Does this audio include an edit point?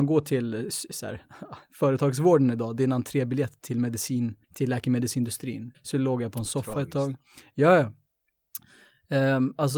yes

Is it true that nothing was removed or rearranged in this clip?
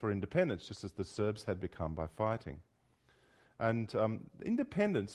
yes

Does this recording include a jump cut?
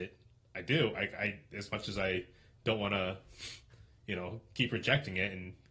no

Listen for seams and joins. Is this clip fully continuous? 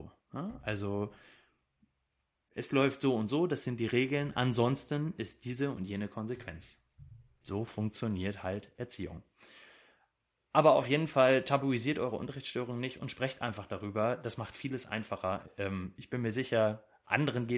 yes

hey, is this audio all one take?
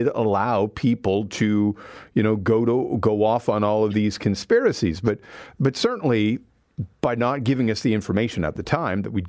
yes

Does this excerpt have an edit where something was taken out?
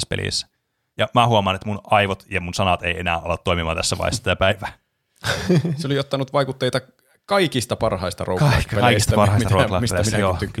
yes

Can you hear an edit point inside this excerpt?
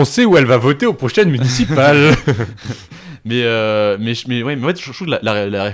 no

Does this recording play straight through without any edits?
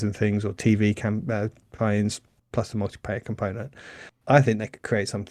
no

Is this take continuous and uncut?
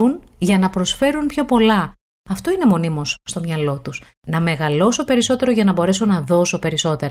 yes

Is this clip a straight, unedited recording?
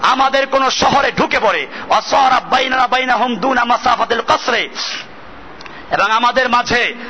yes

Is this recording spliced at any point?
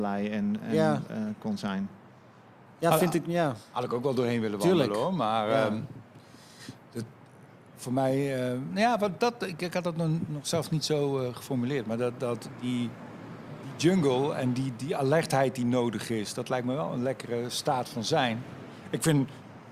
no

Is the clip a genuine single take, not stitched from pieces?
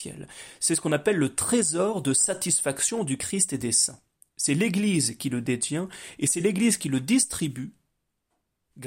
yes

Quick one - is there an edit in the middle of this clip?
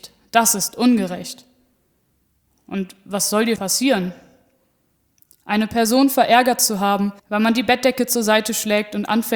yes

